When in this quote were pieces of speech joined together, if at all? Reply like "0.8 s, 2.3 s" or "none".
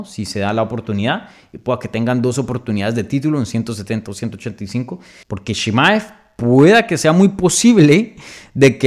5.2 s